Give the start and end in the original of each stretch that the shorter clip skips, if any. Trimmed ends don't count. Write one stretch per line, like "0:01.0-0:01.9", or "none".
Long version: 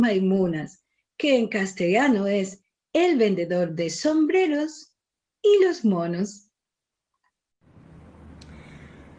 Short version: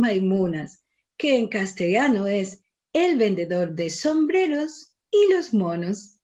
0:05.0-0:05.3